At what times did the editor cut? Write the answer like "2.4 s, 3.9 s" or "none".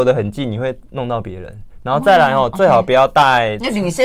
none